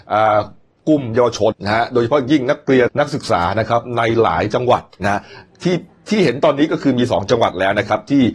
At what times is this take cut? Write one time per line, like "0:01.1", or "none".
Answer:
0:01.5
0:02.9